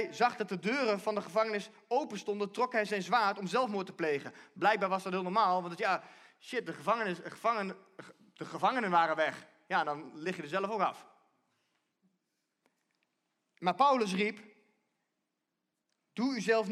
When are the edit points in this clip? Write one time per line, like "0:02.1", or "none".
none